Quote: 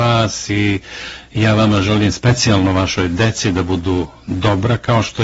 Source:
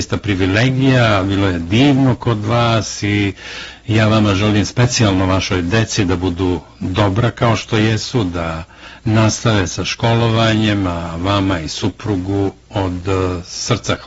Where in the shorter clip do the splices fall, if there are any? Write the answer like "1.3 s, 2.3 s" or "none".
none